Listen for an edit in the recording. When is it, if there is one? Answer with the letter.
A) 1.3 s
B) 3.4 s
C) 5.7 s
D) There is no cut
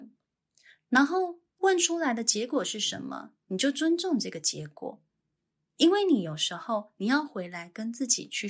D